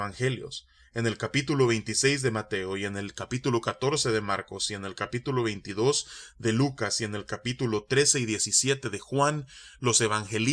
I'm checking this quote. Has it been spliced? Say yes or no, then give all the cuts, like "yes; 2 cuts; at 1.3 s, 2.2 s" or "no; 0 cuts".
no; 0 cuts